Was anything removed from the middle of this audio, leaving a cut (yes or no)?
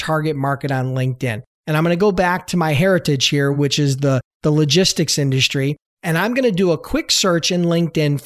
no